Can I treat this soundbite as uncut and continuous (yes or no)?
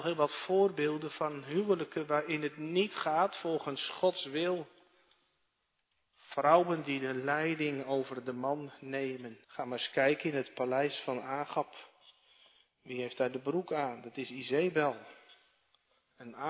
no